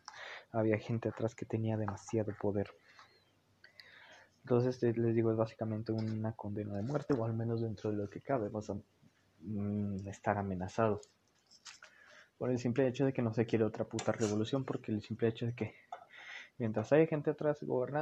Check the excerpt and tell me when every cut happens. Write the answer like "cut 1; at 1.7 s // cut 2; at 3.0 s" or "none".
none